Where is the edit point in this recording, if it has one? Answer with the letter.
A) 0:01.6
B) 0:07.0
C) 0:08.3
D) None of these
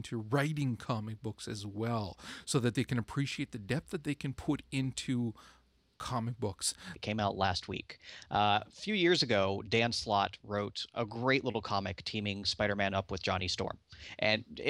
B